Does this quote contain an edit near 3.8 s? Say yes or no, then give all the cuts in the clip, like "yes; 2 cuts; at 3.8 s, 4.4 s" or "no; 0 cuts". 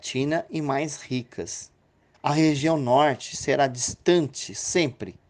no; 1 cut; at 2.1 s